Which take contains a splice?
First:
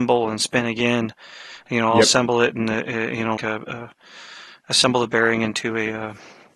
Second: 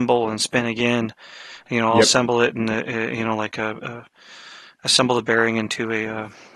first; 1 cut; at 3.4 s

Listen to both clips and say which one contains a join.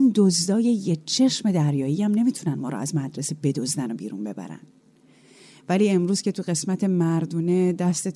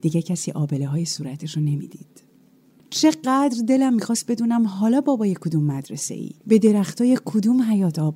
second; 1 cut; at 6.4 s

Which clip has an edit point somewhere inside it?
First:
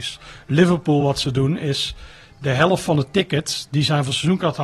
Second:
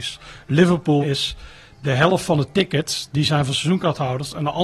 second; 1 cut; at 1.0 s

